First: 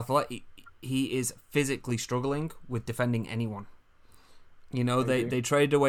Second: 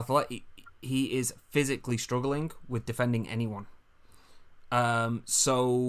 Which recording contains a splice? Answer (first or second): first